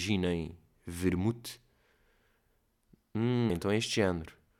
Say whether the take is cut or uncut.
cut